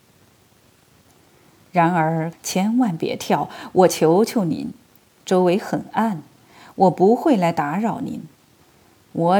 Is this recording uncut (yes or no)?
no